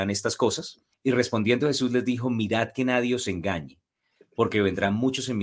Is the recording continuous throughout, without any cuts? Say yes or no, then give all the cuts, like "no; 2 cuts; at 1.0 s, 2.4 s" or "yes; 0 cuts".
no; 1 cut; at 0.9 s